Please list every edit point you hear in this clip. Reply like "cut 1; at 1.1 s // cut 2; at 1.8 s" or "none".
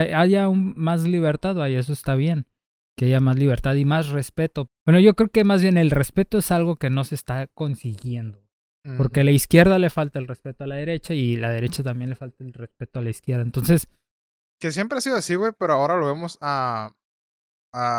cut 1; at 4.7 s